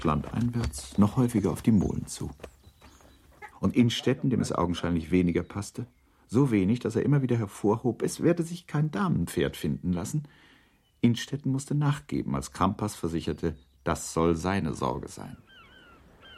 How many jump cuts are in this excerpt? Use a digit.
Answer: 1